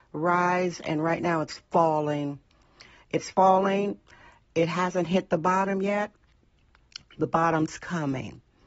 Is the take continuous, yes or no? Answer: yes